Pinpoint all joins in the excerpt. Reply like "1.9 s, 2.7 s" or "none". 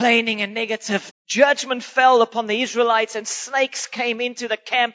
1.1 s